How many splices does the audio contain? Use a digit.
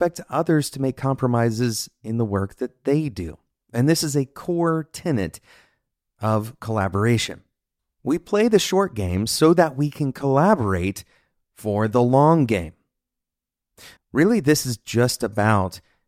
1